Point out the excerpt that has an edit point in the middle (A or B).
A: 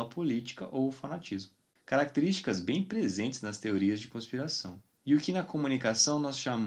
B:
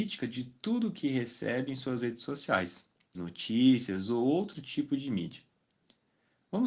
B